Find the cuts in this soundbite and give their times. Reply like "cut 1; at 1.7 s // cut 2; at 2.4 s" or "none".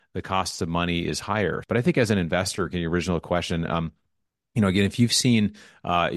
cut 1; at 1.6 s